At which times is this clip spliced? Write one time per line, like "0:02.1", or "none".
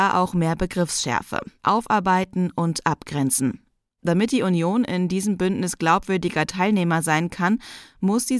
0:01.6